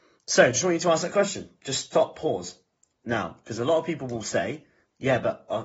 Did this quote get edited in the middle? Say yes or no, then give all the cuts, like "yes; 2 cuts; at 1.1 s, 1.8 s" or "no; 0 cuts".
yes; 1 cut; at 3.0 s